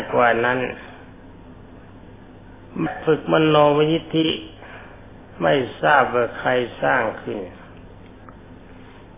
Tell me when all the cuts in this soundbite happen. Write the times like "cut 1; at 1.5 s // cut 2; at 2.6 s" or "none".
cut 1; at 2.9 s